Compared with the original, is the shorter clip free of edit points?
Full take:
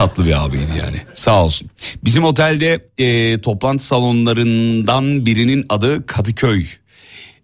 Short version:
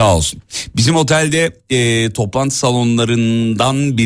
yes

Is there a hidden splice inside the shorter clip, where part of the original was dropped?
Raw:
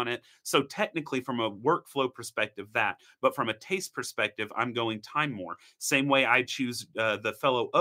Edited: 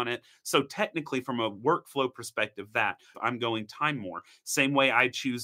yes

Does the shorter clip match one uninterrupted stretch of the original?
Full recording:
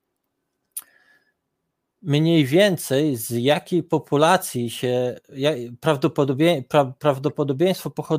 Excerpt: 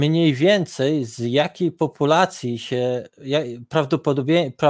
yes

